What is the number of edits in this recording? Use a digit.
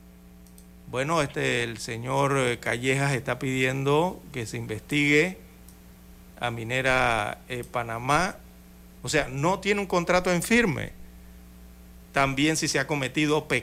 2